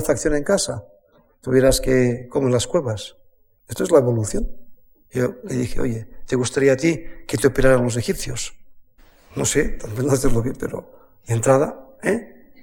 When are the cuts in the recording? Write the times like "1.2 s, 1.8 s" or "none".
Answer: 3.6 s, 5.1 s

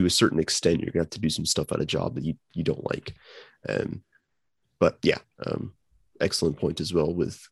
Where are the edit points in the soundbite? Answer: 5.3 s

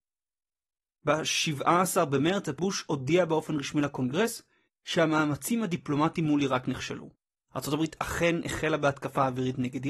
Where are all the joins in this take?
7.5 s

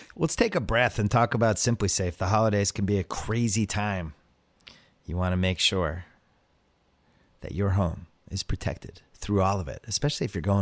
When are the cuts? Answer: none

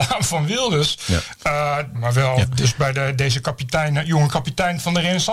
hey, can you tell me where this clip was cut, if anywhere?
1.9 s

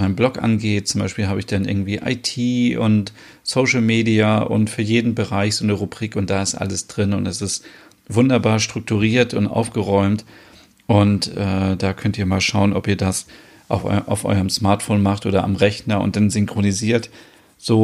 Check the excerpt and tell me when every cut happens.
none

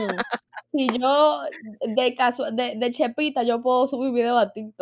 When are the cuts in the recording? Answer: none

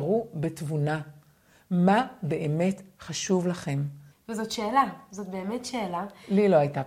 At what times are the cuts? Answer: 4.1 s

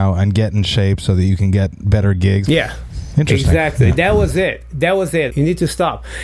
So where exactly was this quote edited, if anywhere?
2.5 s, 5.3 s

